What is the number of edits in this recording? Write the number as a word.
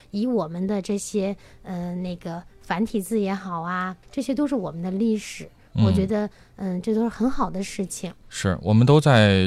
one